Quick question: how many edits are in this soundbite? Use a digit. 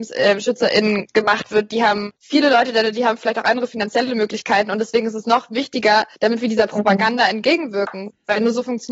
2